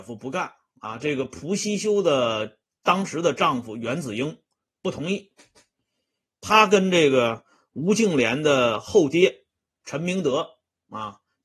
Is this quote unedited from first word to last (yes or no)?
yes